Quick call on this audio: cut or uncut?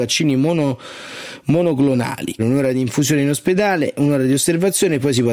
cut